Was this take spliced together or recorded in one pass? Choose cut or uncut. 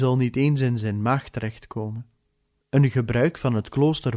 cut